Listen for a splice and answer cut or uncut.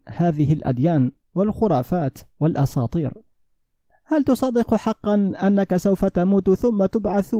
uncut